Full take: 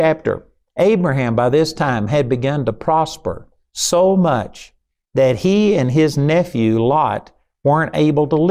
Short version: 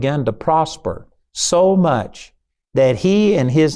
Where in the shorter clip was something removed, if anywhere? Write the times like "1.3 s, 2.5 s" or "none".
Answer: none